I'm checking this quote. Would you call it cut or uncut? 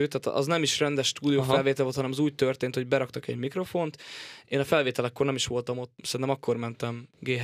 uncut